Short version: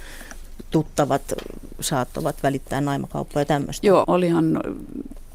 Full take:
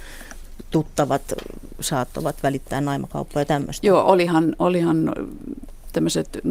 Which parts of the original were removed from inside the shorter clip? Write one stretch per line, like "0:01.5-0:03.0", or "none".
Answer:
0:04.0-0:04.6